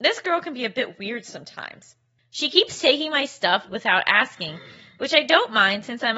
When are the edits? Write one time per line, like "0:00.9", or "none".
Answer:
0:03.7